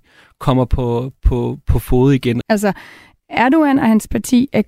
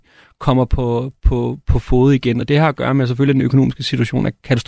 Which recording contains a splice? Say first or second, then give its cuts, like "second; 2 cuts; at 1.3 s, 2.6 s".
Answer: first; 1 cut; at 2.4 s